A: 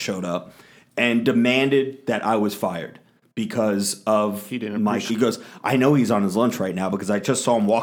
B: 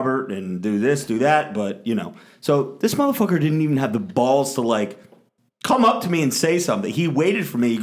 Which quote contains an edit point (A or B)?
A